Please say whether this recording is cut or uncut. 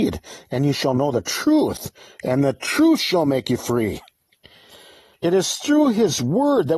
cut